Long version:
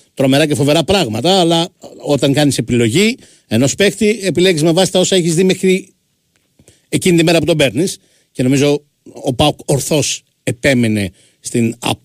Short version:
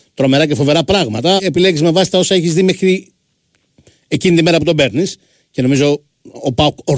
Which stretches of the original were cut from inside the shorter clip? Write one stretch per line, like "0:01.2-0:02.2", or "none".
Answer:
0:01.4-0:04.2

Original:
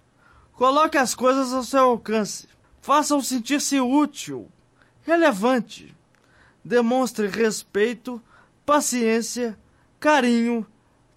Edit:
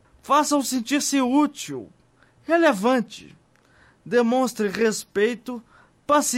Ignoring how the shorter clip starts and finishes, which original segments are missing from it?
none

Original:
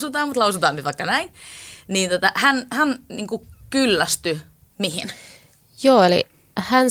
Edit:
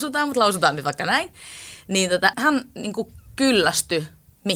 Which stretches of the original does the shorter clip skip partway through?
0:02.3-0:02.7

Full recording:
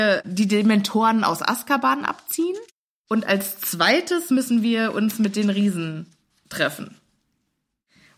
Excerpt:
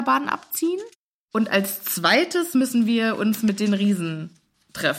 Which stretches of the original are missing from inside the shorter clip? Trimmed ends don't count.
none

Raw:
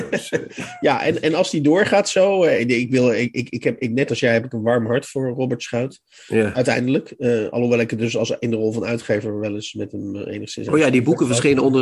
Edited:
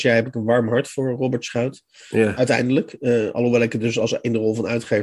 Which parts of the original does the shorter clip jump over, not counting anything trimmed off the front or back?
none

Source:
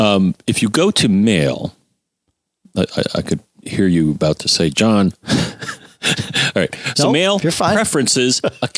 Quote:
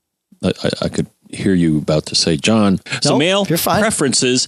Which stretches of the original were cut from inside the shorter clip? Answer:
0:05.2-0:06.8

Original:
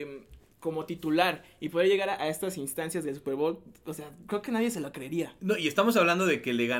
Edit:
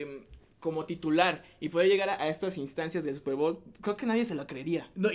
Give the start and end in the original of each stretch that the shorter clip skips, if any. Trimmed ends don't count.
0:03.8-0:04.2

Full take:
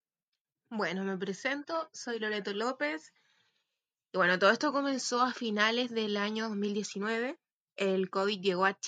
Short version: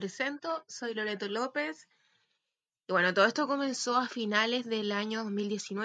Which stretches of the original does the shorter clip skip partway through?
none

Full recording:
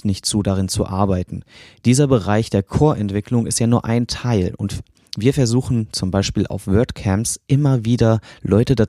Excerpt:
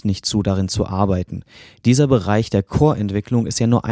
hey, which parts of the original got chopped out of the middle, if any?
none

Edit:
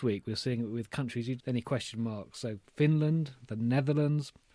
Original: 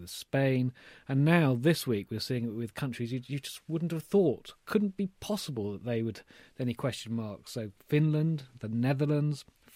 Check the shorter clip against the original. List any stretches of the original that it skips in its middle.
0:03.2-0:06.5

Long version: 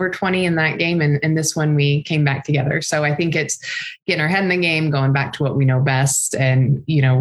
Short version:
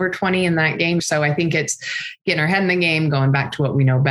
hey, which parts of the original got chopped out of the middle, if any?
0:01.0-0:02.8

